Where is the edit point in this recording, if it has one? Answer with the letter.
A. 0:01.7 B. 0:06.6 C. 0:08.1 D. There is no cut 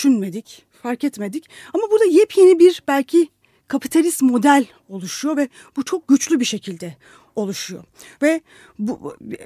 C